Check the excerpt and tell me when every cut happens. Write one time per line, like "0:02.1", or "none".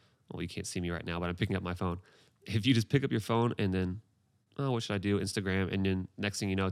none